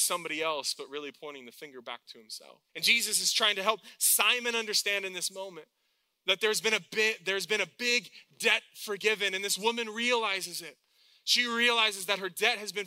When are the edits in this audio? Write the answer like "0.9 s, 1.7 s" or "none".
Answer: 2.7 s